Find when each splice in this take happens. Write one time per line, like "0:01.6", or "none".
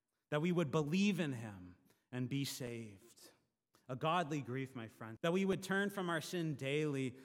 0:03.7
0:05.2